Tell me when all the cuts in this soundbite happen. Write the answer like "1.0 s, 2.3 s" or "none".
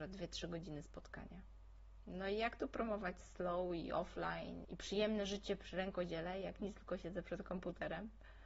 4.6 s